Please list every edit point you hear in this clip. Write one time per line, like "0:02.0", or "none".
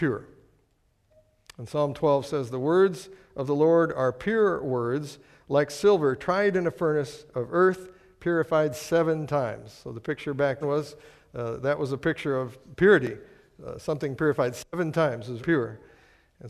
0:10.6
0:15.4